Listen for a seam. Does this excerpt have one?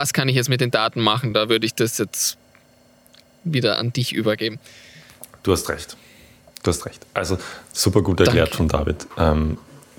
no; 0 cuts

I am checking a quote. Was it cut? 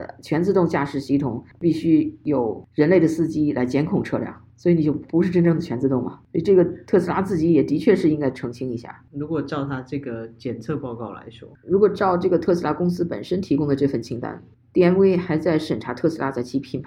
yes; 1 cut; at 9.1 s

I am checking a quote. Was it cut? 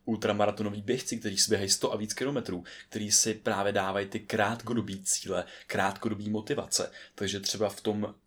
no; 0 cuts

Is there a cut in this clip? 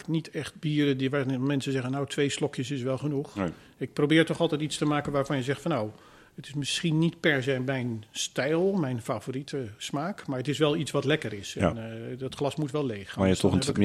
no; 0 cuts

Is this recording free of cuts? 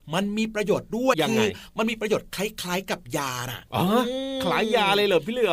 no; 1 cut; at 1.1 s

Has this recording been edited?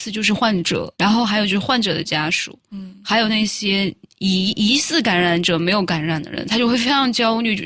yes; 1 cut; at 0.9 s

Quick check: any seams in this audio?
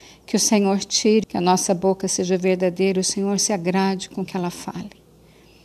yes; 1 cut; at 1.2 s

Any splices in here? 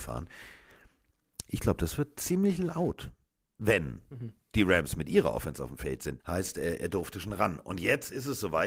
yes; 2 cuts; at 4.1 s, 6.2 s

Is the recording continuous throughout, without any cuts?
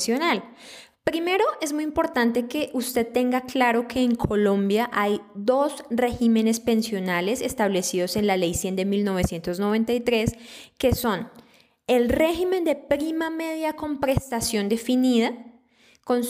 no; 1 cut; at 0.9 s

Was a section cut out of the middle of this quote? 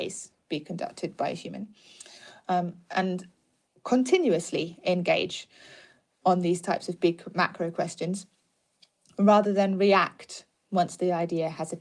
no; 0 cuts

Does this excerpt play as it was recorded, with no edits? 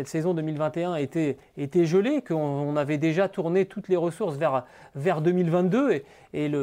yes; 0 cuts

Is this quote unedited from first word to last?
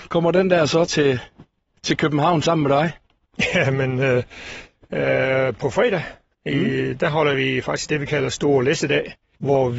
yes; 0 cuts

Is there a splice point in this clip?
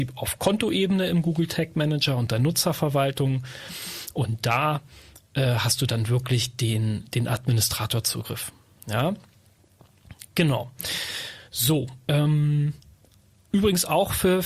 no; 0 cuts

